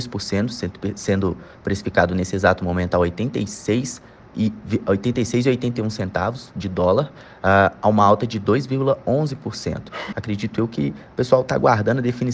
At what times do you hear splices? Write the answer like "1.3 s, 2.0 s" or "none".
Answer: 10.1 s

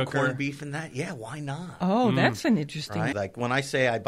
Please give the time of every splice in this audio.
3.1 s

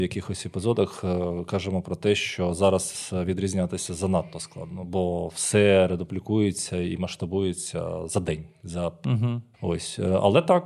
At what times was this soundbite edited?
9.5 s

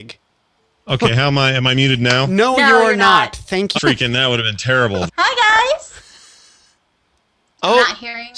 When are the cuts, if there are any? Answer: 3.8 s, 5.1 s

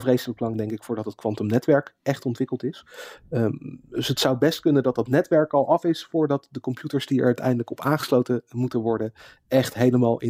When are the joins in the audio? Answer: none

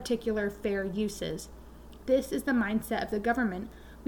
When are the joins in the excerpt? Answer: 2.0 s

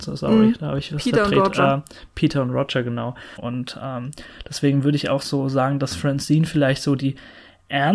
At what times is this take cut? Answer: 3.4 s

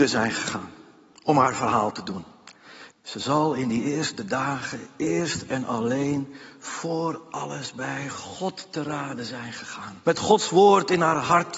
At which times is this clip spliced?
2.9 s, 10.0 s

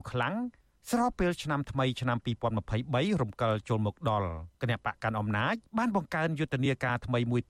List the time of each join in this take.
4.5 s, 5.7 s

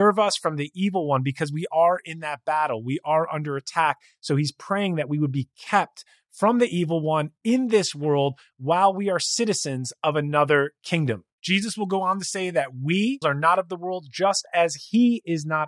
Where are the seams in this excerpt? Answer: 11.3 s, 13.2 s

